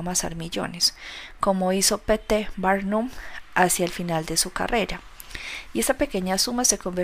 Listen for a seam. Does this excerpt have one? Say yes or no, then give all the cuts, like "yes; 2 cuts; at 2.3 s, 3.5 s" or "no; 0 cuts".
no; 0 cuts